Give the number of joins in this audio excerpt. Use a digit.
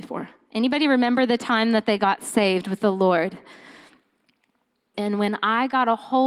1